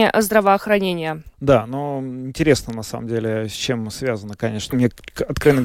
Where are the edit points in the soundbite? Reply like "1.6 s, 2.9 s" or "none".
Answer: 1.3 s, 4.7 s